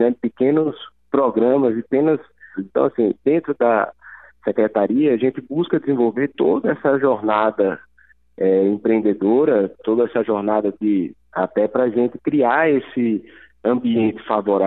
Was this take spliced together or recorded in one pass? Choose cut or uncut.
cut